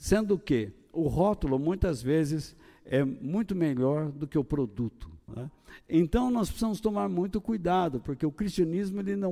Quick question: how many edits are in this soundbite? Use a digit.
1